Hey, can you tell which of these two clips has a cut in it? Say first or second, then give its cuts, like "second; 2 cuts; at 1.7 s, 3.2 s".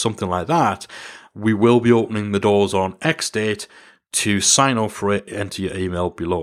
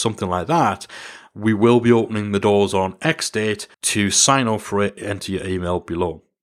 second; 1 cut; at 3.7 s